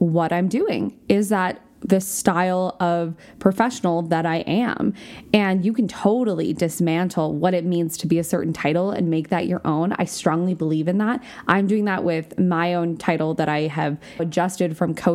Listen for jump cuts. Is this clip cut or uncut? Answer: cut